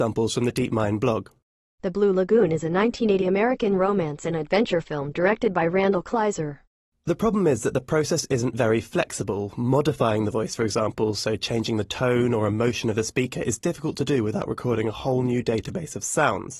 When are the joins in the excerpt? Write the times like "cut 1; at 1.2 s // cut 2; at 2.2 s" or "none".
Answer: none